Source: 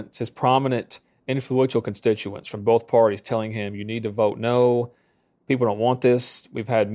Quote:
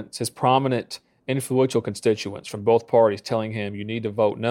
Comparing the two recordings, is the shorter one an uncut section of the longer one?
yes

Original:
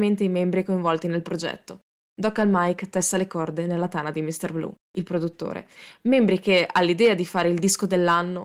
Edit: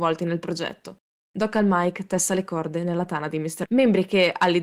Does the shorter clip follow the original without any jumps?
no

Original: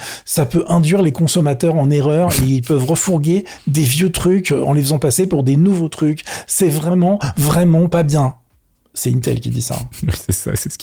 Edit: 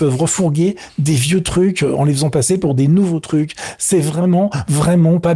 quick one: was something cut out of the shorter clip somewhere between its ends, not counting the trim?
no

